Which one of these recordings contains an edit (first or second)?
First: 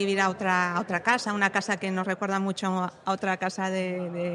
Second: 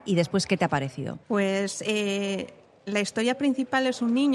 second